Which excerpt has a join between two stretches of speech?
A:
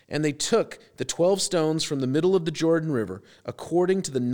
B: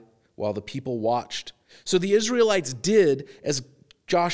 B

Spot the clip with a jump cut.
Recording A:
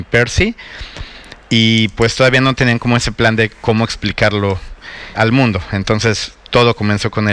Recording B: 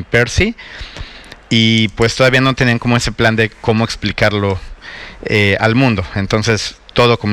A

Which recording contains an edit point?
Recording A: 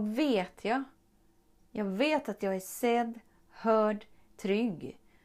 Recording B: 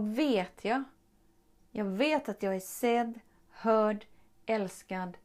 A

